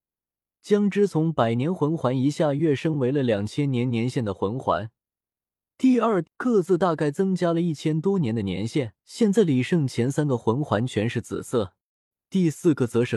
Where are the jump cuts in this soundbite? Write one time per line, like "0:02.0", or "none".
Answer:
0:06.2
0:09.0